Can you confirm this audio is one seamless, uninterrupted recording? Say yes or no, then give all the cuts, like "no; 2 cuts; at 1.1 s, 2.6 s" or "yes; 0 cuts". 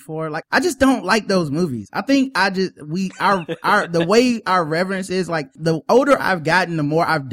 yes; 0 cuts